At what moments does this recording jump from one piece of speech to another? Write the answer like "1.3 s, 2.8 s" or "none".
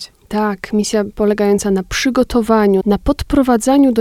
2.8 s